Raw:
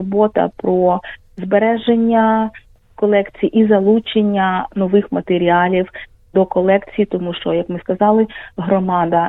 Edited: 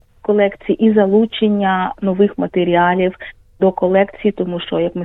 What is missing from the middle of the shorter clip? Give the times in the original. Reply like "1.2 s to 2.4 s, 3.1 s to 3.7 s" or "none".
none